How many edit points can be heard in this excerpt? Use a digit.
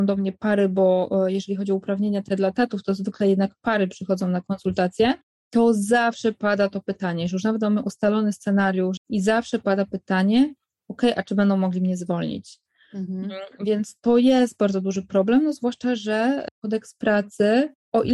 1